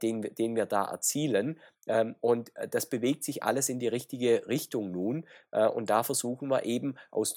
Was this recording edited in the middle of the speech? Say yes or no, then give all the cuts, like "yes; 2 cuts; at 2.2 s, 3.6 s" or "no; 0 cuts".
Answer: no; 0 cuts